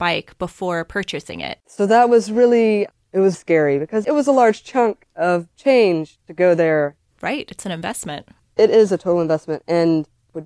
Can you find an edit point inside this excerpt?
yes; 2 cuts; at 1.6 s, 3.3 s

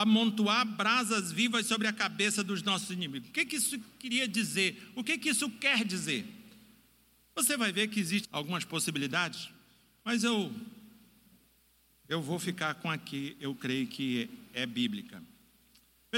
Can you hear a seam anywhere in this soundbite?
yes; 1 cut; at 8.2 s

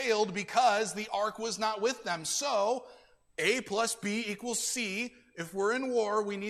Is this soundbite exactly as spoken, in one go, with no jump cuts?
yes; 0 cuts

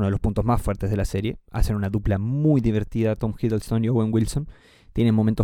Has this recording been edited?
no; 0 cuts

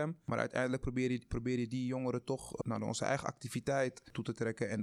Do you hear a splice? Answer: no; 0 cuts

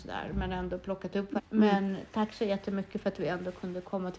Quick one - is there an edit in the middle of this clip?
yes; 1 cut; at 1.4 s

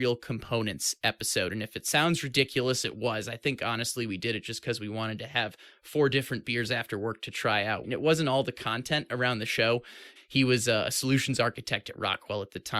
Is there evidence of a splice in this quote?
yes; 2 cuts; at 7.8 s, 10.2 s

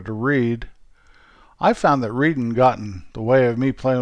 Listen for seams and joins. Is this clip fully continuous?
yes; 0 cuts

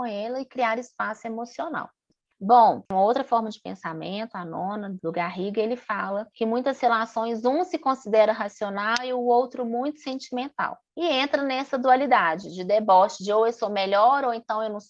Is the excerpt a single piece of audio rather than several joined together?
yes; 0 cuts

